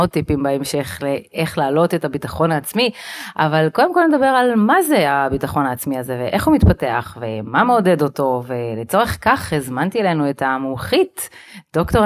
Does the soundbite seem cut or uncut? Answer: uncut